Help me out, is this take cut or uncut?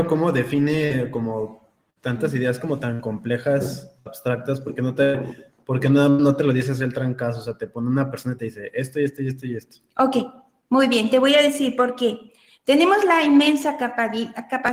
uncut